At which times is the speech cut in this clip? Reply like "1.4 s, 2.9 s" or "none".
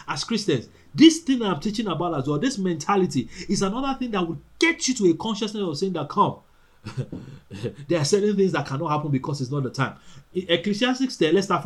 10.3 s

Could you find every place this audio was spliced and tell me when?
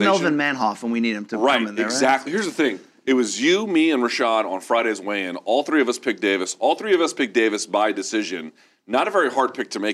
2.3 s

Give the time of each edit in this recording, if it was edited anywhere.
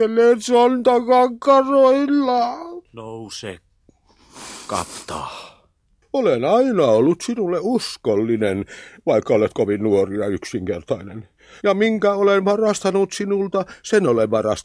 6.0 s

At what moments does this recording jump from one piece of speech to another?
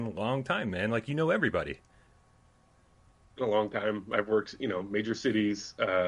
none

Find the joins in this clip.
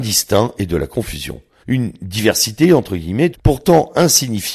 1.6 s, 3.3 s

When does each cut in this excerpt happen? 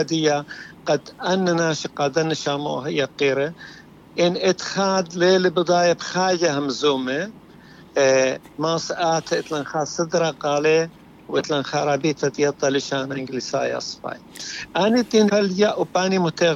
15.3 s

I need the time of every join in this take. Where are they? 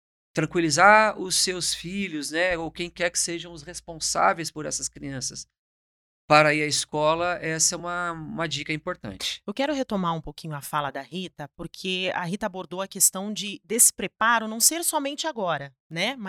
none

